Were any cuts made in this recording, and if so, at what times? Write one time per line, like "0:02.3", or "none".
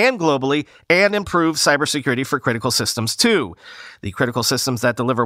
0:04.0